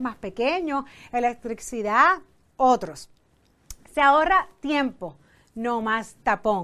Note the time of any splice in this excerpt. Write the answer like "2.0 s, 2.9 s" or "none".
none